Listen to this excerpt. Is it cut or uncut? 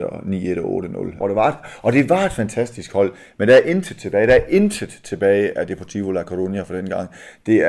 cut